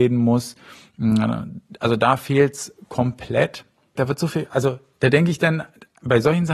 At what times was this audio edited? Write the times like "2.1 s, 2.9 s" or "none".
4.0 s